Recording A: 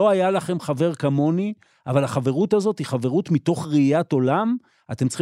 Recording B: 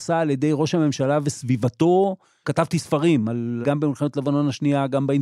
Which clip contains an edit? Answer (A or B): B